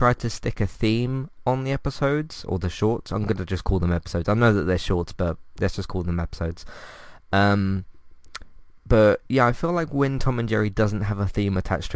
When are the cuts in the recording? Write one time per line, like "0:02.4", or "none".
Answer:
0:08.8